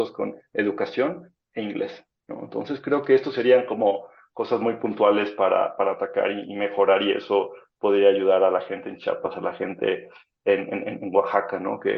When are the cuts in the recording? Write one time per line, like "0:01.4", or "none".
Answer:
none

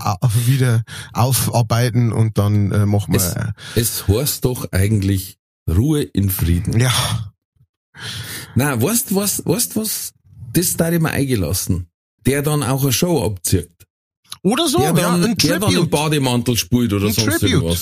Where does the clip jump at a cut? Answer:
0:12.2

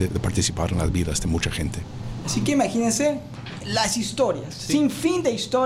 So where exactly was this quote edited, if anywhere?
0:03.6

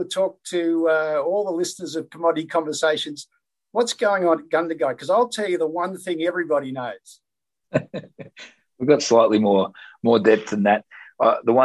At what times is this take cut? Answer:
0:07.7

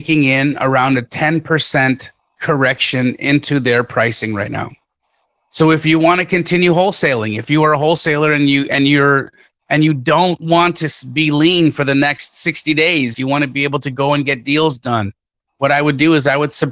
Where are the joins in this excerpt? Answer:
0:13.1

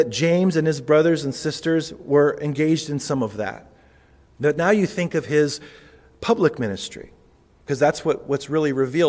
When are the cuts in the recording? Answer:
0:04.3

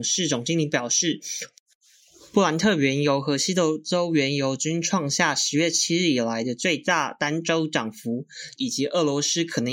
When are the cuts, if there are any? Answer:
0:08.6

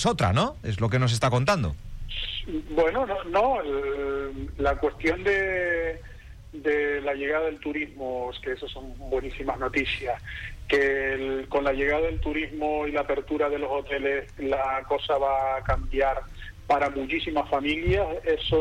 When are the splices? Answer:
none

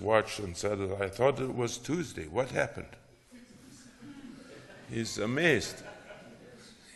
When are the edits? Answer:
none

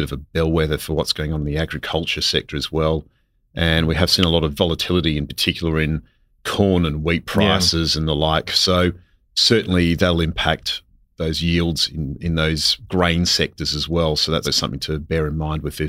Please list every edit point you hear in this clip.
0:08.5
0:14.4

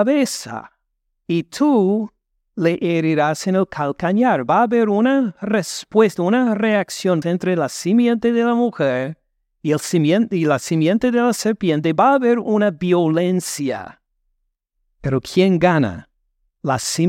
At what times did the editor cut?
0:07.2

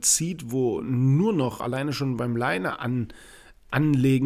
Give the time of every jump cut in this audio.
0:01.6

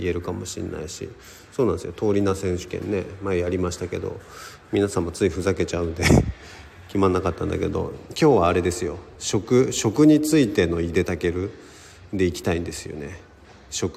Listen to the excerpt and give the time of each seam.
none

